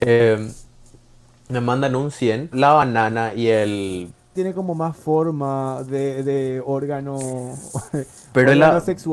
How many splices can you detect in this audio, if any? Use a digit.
2